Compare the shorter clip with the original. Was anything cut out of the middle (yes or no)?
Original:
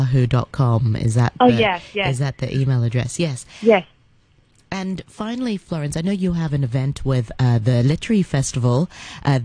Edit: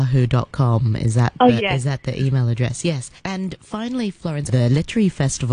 yes